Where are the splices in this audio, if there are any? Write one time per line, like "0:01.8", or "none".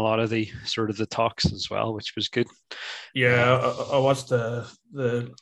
none